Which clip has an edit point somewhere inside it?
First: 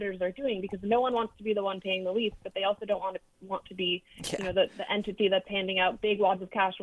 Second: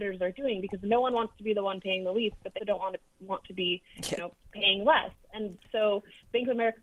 second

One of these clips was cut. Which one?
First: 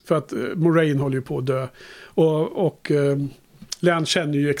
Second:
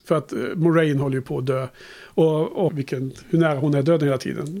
second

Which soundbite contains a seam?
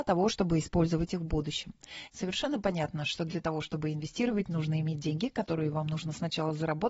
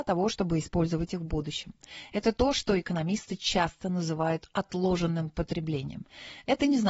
first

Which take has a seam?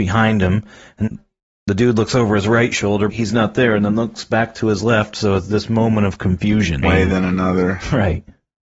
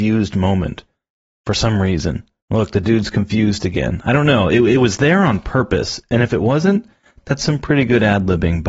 first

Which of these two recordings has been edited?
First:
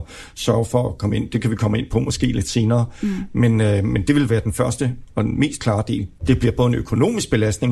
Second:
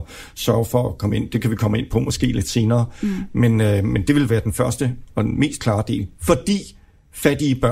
first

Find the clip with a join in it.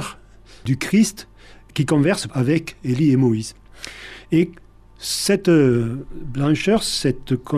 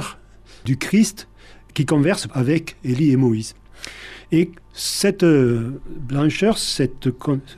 second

